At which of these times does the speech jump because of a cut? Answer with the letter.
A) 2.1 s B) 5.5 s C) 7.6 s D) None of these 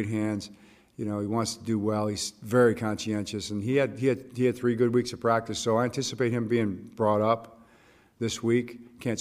D